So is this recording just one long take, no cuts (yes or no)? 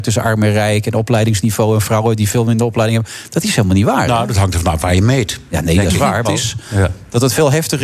no